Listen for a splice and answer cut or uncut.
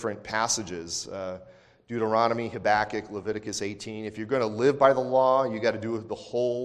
uncut